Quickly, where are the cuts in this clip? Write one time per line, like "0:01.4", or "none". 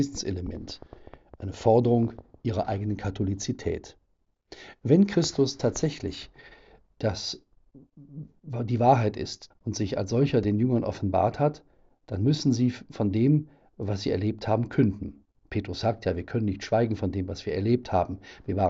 0:09.5